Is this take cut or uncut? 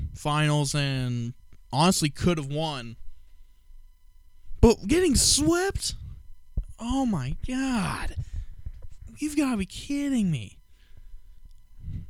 uncut